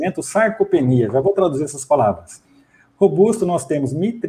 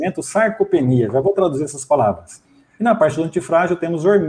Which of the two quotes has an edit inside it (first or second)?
second